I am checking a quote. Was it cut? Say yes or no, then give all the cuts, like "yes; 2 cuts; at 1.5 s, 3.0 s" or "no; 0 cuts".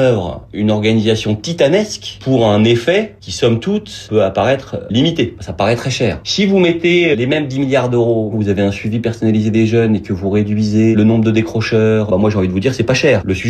yes; 1 cut; at 8.3 s